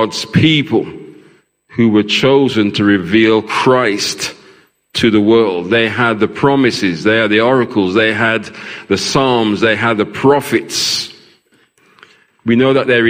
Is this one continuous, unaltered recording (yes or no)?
yes